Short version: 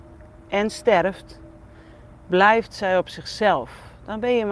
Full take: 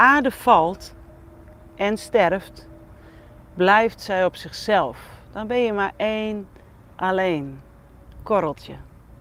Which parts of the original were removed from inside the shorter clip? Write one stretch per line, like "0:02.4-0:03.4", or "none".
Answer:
none